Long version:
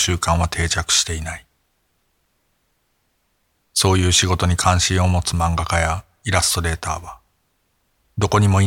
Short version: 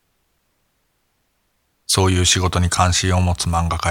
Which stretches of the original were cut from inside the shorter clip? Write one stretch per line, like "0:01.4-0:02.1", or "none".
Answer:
none